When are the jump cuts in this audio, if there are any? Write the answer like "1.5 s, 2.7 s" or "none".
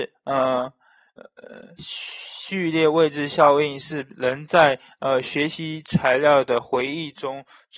1.8 s